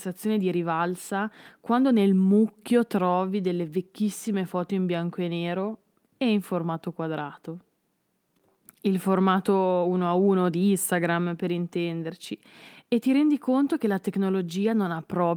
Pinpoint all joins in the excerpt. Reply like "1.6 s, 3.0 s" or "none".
none